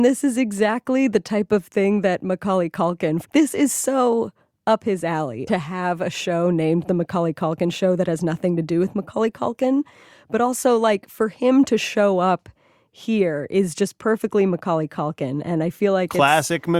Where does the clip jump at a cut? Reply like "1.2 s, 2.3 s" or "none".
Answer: 3.2 s, 5.5 s